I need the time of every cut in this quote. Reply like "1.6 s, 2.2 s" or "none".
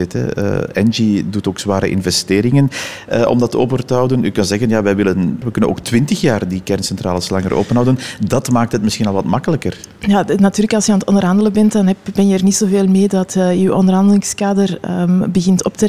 5.4 s